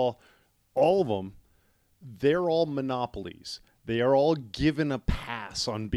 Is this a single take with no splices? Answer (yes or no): yes